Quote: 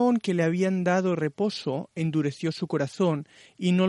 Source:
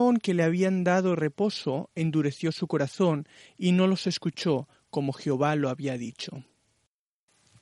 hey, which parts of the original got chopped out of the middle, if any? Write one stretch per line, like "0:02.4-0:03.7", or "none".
none